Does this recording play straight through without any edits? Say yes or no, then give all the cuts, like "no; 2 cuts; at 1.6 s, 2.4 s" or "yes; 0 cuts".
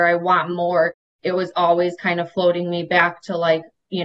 yes; 0 cuts